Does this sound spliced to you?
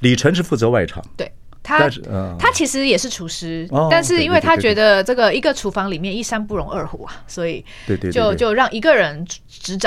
no; 0 cuts

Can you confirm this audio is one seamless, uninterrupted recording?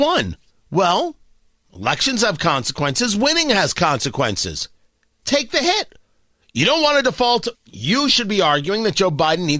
no; 2 cuts; at 5.2 s, 7.5 s

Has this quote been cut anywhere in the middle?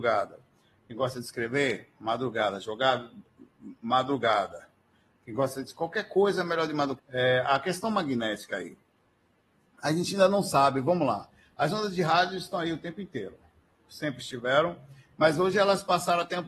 yes; 1 cut; at 7.0 s

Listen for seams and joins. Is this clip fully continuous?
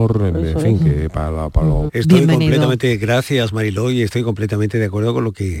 no; 1 cut; at 1.9 s

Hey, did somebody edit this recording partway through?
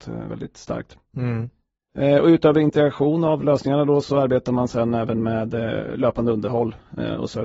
no; 0 cuts

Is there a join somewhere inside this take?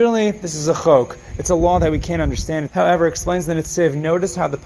yes; 1 cut; at 2.7 s

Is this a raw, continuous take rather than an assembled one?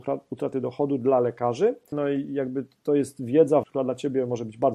no; 2 cuts; at 1.9 s, 3.6 s

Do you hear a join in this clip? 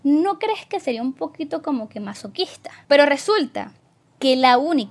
no; 0 cuts

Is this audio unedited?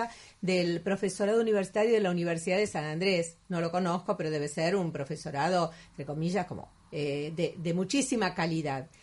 no; 1 cut; at 6.8 s

